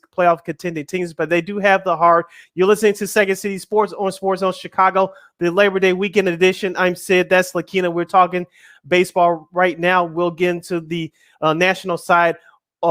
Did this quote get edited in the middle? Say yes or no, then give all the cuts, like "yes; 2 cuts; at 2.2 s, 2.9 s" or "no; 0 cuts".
yes; 1 cut; at 2.4 s